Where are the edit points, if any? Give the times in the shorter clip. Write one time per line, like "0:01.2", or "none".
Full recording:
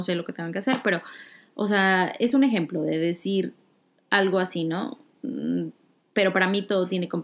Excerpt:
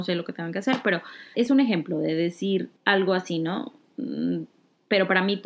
0:01.3
0:02.8